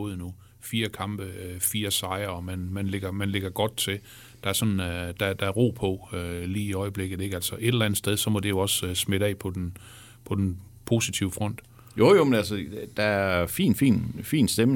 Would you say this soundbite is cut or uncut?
cut